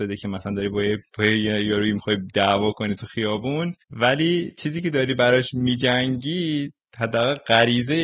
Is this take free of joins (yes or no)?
no